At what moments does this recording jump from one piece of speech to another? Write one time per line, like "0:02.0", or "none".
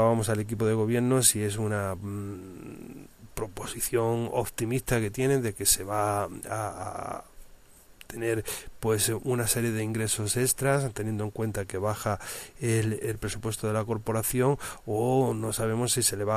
0:13.0